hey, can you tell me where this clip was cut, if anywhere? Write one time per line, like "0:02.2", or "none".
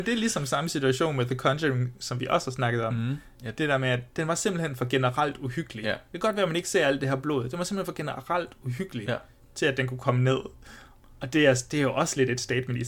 none